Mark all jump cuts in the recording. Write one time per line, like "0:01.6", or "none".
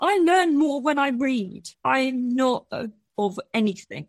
0:01.7
0:03.1